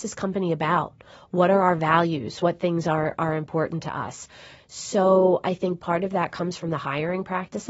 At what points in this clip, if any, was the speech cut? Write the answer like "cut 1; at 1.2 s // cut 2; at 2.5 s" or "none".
none